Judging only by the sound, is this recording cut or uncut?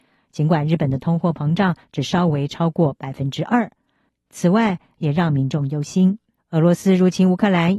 cut